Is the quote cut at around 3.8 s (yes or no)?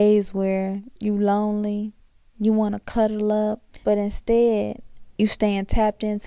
yes